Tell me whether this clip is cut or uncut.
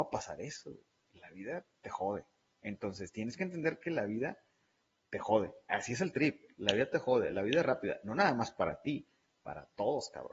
uncut